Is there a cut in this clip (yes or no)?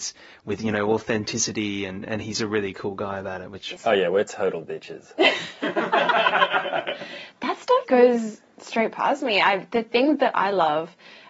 yes